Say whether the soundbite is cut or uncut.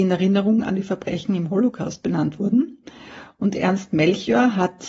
uncut